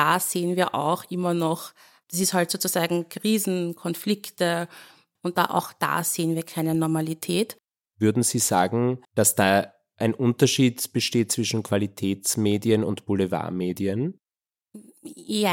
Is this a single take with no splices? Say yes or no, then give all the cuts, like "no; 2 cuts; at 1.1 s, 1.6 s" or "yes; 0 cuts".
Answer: no; 2 cuts; at 5.2 s, 9.0 s